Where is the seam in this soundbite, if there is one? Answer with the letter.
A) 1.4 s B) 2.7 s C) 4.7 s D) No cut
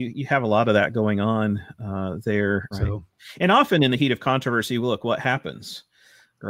B